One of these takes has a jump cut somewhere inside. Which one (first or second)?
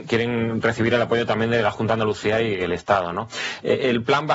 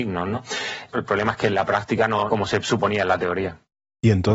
second